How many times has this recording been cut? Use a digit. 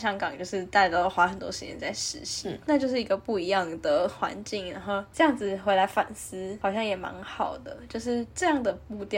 0